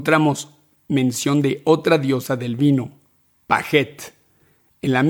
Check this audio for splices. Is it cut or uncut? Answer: uncut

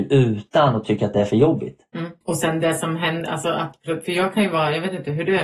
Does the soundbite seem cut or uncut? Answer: cut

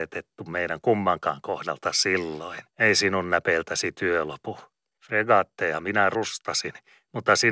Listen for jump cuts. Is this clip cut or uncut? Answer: cut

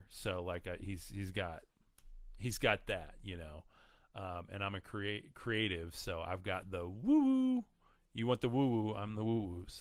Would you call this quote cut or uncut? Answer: uncut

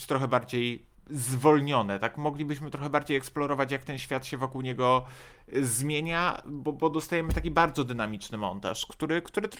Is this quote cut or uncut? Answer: uncut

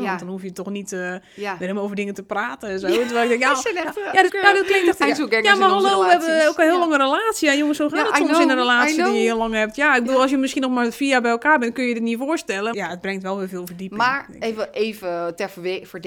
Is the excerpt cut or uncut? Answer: cut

